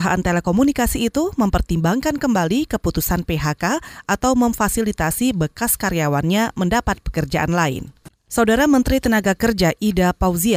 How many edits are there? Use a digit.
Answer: 1